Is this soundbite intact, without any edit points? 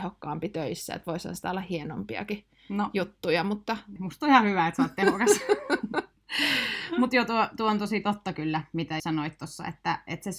no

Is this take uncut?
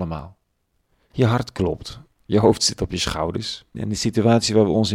no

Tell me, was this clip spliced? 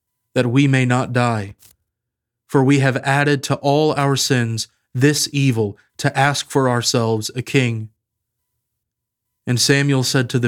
no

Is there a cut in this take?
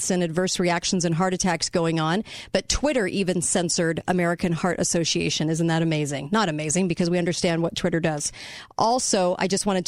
no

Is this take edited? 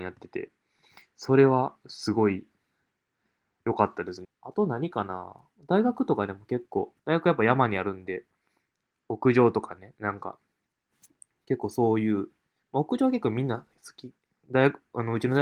yes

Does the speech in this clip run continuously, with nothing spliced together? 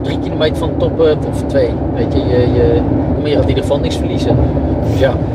no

